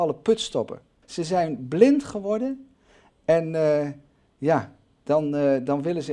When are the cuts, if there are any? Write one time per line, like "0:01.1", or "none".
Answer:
0:01.0